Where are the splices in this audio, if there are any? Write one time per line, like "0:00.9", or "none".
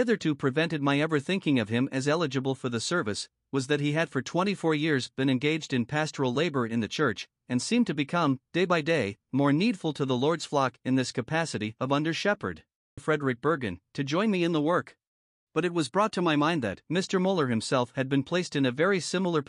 0:13.0
0:15.5
0:16.8

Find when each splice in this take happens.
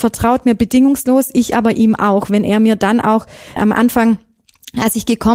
0:03.6

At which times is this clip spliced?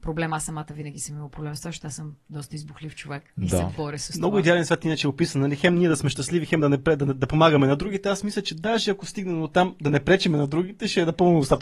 0:03.3

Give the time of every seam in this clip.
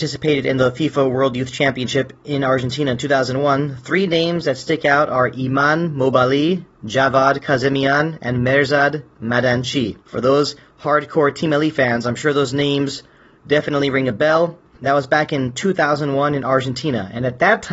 0:10.0
0:14.7

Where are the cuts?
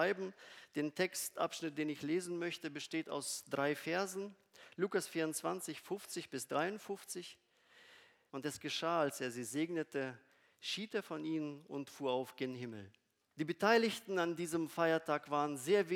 0:08.3
0:13.3

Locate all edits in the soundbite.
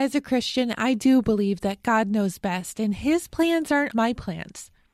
0:03.9

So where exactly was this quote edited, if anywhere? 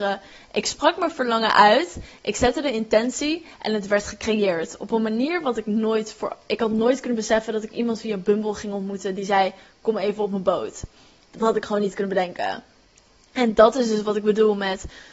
none

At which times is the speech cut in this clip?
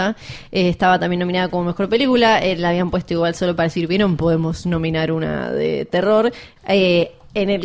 0:06.6

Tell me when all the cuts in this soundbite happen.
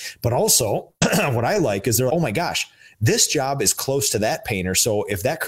0:02.1

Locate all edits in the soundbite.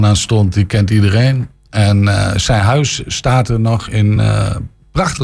none

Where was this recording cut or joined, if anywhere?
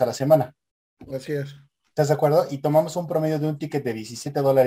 none

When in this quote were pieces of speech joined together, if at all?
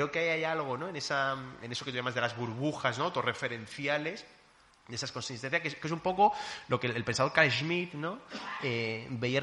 none

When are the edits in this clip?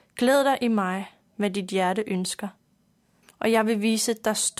0:01.3
0:03.2

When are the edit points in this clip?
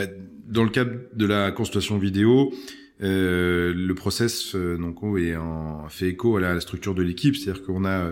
none

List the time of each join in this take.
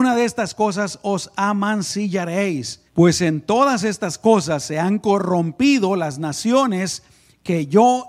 0:02.9

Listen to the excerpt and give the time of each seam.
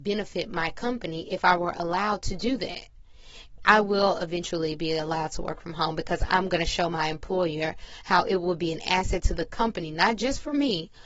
0:03.6

